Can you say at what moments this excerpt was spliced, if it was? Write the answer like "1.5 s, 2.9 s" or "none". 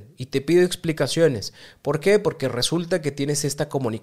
none